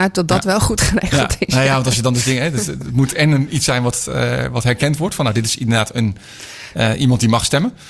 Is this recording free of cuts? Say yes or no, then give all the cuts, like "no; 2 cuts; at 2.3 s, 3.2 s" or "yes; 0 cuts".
yes; 0 cuts